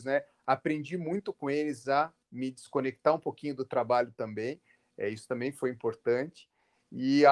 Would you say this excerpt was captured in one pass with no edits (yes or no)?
yes